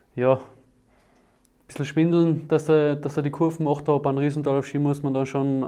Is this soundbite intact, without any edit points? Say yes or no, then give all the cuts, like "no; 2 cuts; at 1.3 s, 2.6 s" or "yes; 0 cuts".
yes; 0 cuts